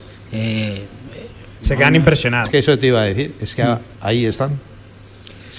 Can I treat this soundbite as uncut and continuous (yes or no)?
no